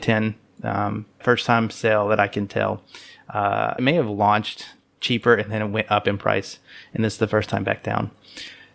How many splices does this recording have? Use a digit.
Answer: 2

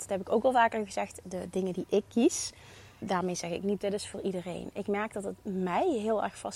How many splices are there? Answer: 1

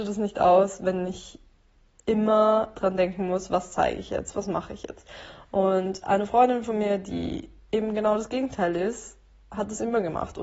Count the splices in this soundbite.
0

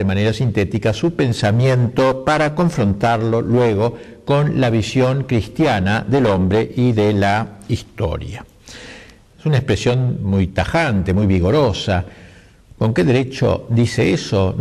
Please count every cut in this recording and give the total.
1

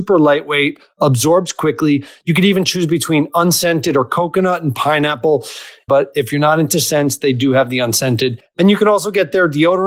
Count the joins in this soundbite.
1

